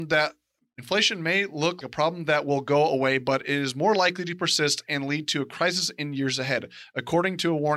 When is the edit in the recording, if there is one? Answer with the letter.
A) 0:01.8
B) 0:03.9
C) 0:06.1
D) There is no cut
A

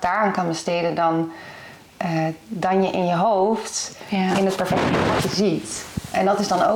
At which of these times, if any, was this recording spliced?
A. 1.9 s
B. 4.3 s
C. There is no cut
C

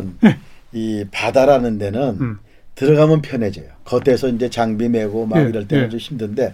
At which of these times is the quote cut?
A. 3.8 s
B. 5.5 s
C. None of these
A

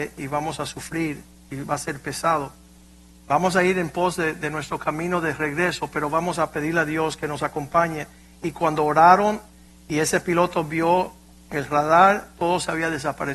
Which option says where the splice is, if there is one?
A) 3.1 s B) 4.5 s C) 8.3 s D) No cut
A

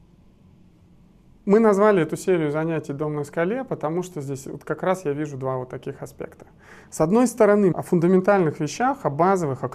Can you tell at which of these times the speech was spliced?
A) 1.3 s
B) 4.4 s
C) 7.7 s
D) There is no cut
C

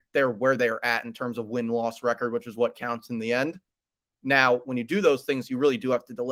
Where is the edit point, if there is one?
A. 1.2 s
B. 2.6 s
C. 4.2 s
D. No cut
C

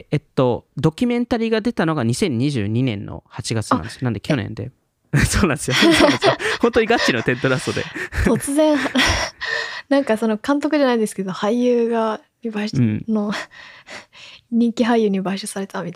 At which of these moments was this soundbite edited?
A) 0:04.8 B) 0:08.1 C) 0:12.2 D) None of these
A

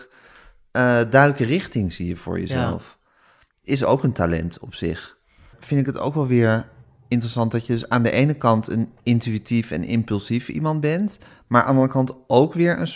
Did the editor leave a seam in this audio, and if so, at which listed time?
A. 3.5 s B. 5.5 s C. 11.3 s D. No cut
B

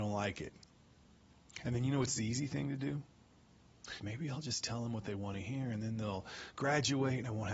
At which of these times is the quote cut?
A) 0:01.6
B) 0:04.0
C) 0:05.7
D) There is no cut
B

